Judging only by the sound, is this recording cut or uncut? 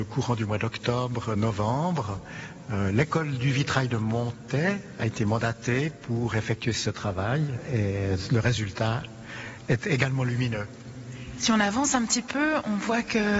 uncut